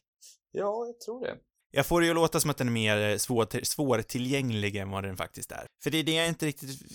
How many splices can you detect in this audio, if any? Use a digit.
1